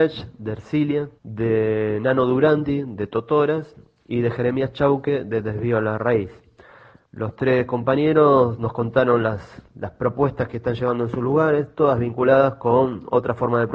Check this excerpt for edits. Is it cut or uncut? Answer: cut